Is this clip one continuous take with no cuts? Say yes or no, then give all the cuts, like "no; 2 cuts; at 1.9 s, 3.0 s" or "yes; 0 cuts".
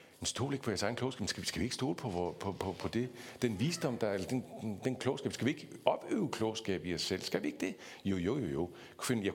yes; 0 cuts